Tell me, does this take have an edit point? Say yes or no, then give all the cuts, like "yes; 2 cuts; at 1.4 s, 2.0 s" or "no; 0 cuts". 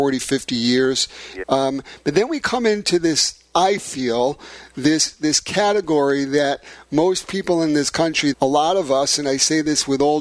yes; 2 cuts; at 1.4 s, 8.3 s